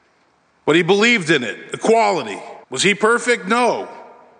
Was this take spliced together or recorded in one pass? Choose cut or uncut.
cut